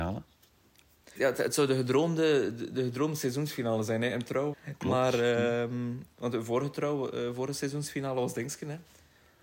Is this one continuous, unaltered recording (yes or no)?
no